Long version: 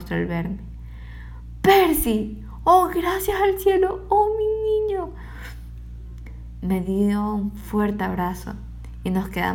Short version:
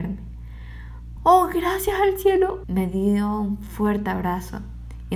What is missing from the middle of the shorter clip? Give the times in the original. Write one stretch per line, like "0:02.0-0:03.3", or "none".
0:01.6-0:02.6
0:04.0-0:06.6